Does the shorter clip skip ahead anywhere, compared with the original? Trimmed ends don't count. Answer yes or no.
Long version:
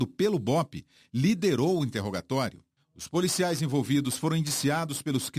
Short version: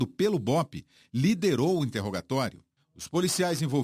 no